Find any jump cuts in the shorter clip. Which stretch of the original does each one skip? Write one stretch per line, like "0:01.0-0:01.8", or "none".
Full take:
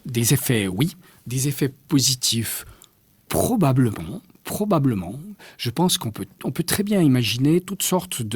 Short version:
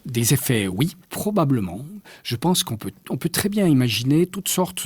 0:01.0-0:04.4